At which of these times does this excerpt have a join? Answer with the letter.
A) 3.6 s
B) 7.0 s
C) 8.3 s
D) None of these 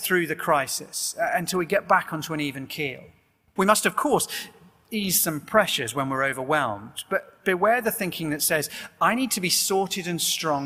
A